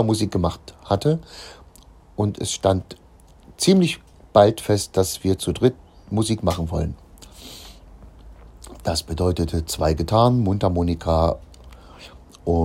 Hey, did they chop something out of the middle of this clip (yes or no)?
no